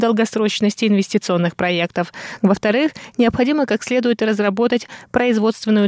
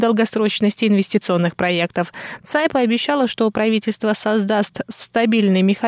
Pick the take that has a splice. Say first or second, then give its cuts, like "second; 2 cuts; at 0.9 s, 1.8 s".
first; 1 cut; at 2.4 s